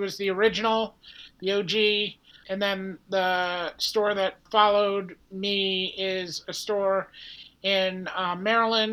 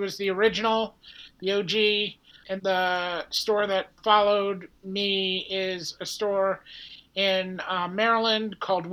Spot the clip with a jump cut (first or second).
second